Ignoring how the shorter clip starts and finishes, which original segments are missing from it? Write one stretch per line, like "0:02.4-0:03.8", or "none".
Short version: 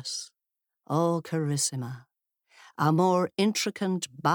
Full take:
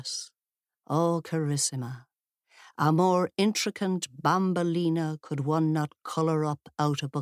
none